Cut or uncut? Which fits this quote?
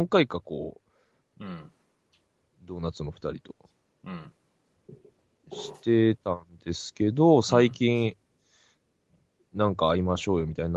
cut